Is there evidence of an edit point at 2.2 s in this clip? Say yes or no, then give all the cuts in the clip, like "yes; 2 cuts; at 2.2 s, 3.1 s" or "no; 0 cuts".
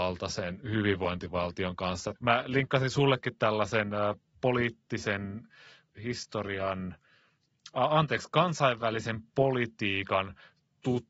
yes; 1 cut; at 2.2 s